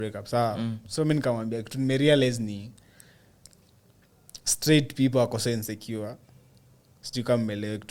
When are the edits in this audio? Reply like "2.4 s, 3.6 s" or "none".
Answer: none